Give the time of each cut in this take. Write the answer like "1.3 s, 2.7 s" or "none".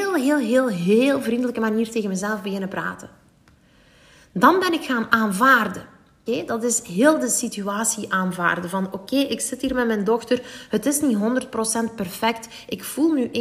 6.3 s